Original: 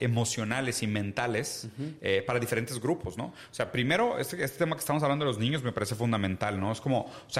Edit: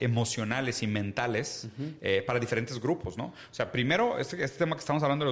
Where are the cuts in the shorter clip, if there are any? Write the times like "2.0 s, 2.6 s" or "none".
none